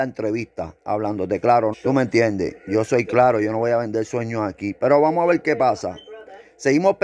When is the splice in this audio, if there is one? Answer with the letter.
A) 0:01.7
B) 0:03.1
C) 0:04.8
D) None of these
A